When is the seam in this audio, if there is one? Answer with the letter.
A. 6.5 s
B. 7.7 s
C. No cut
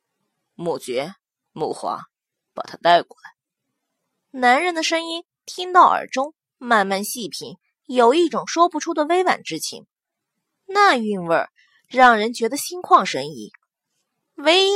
C